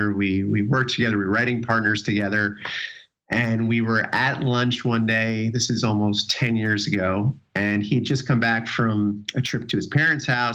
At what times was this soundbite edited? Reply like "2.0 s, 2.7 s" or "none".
none